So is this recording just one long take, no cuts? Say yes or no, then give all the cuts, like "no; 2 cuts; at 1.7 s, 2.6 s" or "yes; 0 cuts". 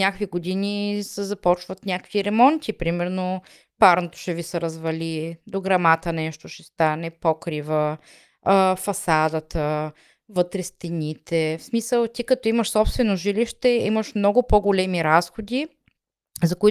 yes; 0 cuts